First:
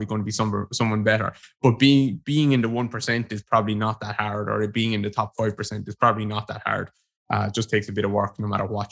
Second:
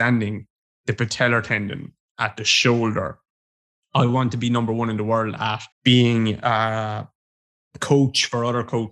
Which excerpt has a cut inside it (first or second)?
second